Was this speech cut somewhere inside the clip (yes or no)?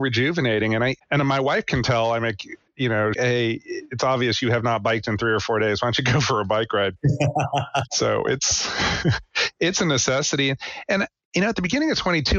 yes